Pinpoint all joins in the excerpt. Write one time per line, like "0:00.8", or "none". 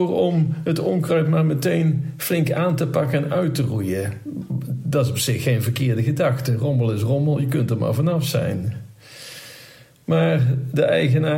none